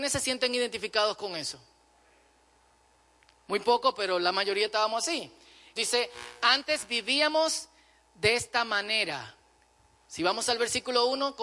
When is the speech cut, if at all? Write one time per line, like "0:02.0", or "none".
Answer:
0:05.8